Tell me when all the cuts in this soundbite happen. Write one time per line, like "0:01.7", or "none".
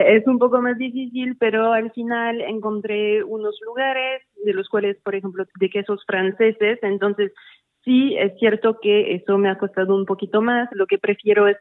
0:05.5
0:10.7